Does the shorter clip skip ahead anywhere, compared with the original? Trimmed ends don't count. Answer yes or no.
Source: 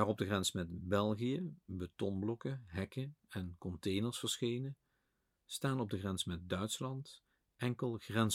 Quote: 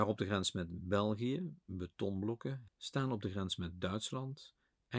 yes